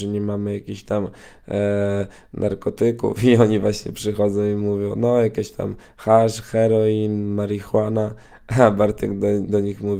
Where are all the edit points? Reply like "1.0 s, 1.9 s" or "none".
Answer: none